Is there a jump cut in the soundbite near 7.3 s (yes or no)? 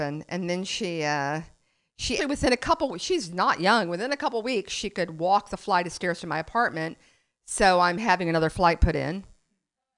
no